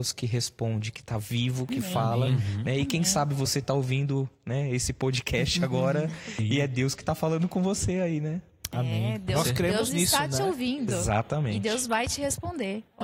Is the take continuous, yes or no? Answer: yes